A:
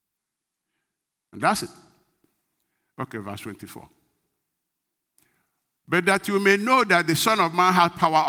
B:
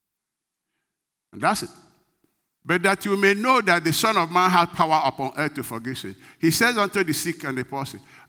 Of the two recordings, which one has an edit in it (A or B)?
B